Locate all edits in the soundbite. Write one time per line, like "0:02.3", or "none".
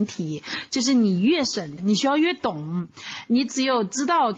0:01.8